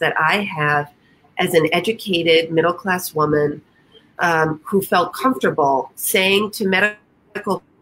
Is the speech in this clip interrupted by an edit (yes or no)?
no